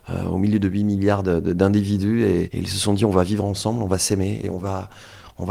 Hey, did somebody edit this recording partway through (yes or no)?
yes